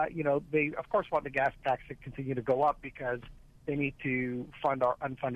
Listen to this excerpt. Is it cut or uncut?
uncut